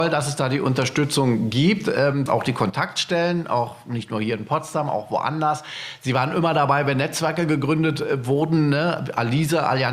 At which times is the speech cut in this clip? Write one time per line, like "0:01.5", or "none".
0:02.3